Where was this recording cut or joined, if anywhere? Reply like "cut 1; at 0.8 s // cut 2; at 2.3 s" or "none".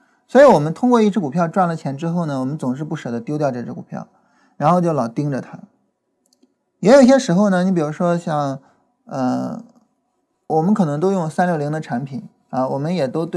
cut 1; at 10.5 s